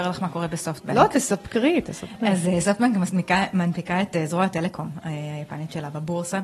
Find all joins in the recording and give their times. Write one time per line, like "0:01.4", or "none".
none